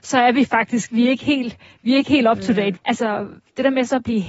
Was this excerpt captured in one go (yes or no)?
no